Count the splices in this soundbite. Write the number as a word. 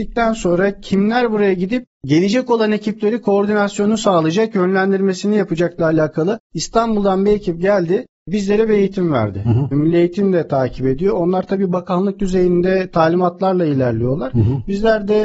one